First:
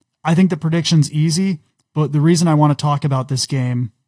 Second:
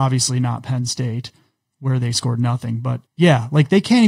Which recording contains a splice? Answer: second; 1 cut; at 3.1 s

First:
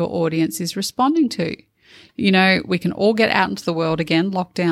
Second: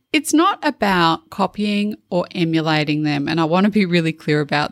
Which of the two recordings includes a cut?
first; 1 cut; at 2.1 s

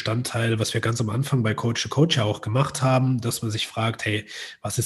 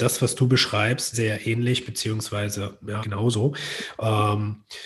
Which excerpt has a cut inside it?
second; 2 cuts; at 1.1 s, 3.0 s

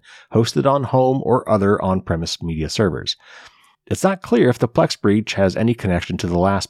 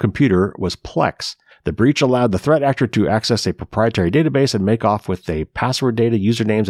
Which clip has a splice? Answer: second; 1 cut; at 1.5 s

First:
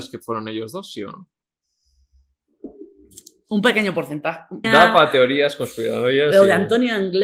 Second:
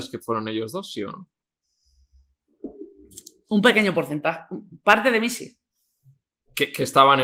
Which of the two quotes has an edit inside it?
first; 1 cut; at 4.6 s

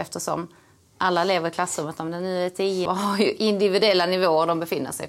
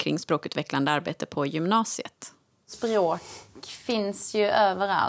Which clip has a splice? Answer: first; 1 cut; at 2.9 s

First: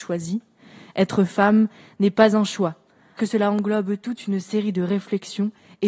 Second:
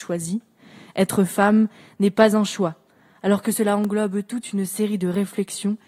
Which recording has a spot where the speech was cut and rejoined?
first; 1 cut; at 3.2 s

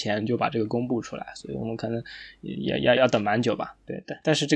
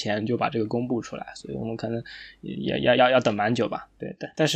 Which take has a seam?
first; 1 cut; at 3.0 s

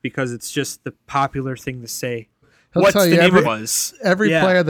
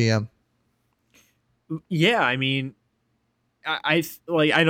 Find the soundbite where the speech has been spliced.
first; 2 cuts; at 2.4 s, 3.4 s

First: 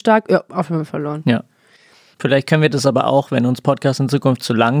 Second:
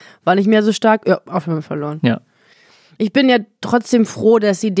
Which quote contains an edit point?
first; 1 cut; at 2.1 s

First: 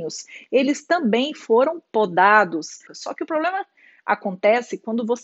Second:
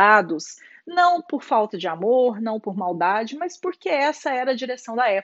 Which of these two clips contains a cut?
first; 1 cut; at 2.9 s

